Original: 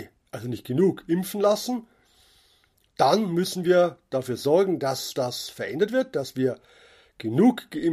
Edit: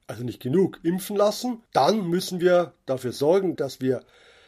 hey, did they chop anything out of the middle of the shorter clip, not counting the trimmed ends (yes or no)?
yes